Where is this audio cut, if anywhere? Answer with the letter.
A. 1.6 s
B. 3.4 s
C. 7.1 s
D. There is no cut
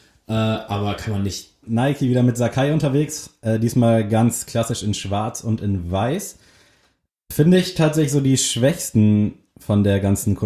A